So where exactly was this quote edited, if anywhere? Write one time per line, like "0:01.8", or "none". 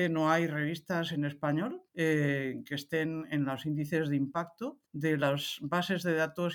0:01.9
0:04.8